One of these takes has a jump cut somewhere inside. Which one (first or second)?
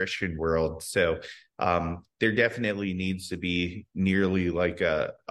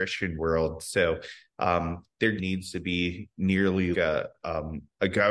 second